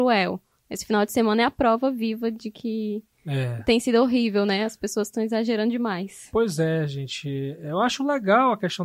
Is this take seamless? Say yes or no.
yes